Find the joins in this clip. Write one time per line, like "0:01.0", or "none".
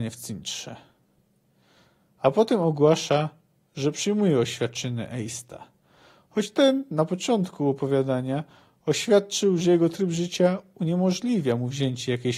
none